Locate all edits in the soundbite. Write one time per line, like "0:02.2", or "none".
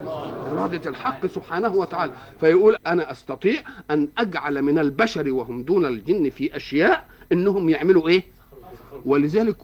0:02.8